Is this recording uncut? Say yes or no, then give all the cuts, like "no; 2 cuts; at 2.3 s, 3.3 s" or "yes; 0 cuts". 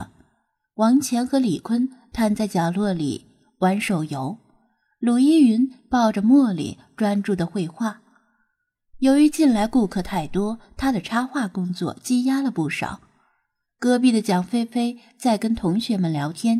yes; 0 cuts